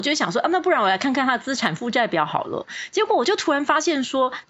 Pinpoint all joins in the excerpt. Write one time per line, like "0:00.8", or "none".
none